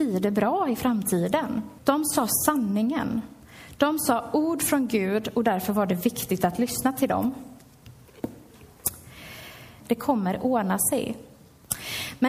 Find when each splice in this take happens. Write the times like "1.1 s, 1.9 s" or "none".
1.8 s, 9.8 s